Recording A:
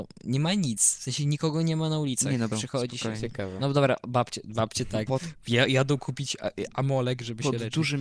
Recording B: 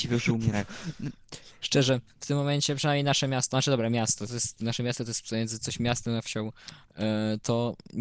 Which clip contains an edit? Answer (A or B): A